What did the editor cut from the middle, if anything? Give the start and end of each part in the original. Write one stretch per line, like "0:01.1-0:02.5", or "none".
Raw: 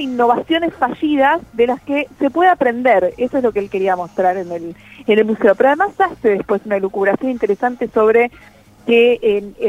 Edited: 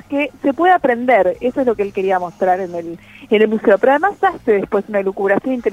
none